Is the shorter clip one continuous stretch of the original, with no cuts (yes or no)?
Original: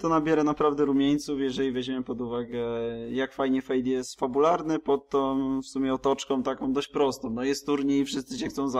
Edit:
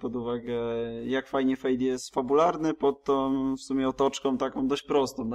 yes